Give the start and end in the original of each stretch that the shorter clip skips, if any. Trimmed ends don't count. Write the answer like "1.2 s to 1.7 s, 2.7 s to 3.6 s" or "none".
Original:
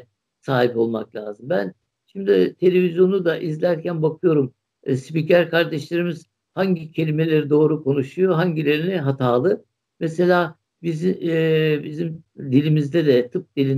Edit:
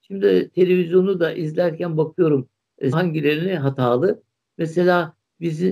5.0 s to 8.3 s